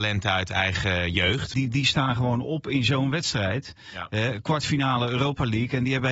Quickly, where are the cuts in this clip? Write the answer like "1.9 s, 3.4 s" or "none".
1.5 s